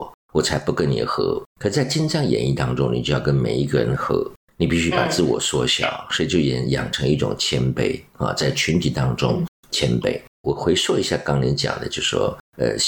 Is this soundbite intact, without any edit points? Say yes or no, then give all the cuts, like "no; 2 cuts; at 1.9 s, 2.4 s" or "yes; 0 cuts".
yes; 0 cuts